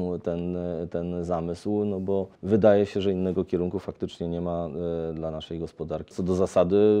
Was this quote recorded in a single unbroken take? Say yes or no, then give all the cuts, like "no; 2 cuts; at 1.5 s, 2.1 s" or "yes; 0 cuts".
no; 2 cuts; at 2.4 s, 6.1 s